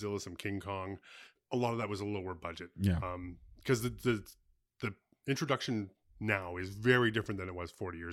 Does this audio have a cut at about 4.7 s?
no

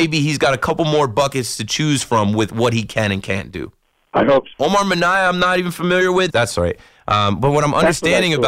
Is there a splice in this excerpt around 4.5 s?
yes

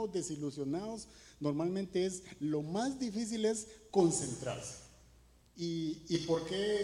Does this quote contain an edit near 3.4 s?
no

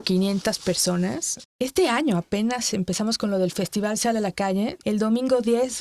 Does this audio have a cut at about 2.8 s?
no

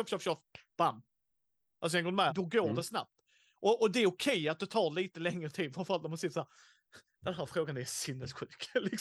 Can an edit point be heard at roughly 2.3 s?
yes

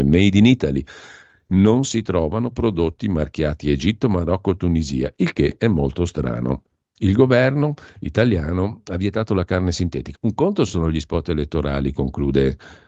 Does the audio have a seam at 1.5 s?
no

